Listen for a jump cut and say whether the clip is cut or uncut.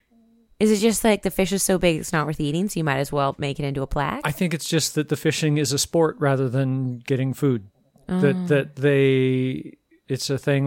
uncut